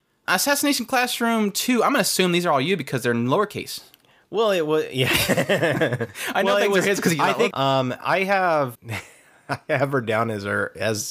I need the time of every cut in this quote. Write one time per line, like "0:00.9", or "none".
0:07.5
0:08.7